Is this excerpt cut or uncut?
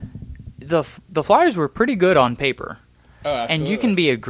uncut